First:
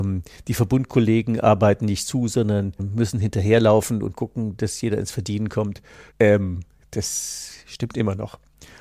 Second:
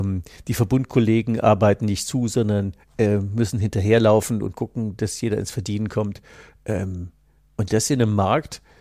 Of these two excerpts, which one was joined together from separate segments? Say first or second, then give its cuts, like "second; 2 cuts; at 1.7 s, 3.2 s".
first; 2 cuts; at 2.8 s, 6.1 s